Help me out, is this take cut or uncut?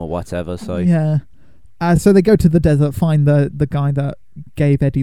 uncut